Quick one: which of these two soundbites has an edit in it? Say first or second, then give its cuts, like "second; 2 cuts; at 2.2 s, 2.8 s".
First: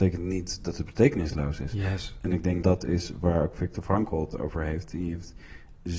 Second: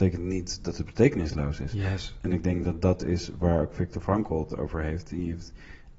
first; 1 cut; at 2.6 s